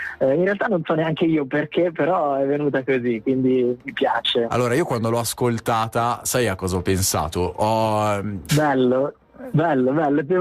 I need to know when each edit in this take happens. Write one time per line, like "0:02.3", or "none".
0:08.5